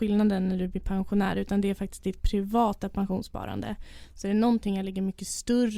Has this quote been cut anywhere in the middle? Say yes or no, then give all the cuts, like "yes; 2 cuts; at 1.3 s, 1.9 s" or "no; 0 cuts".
no; 0 cuts